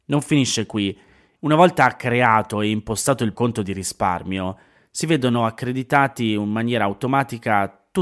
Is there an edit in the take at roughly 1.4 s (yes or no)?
yes